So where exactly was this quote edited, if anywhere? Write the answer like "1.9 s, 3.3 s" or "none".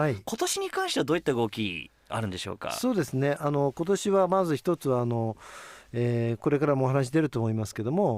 none